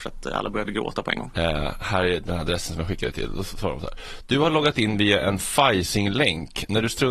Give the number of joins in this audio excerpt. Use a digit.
1